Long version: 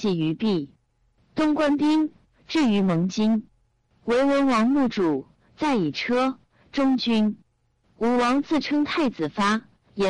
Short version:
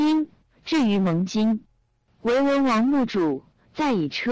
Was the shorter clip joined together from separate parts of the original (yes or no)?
no